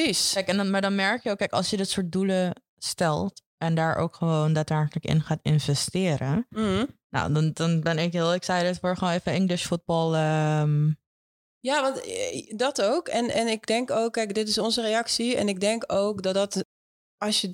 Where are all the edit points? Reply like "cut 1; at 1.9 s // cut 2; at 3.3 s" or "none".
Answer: none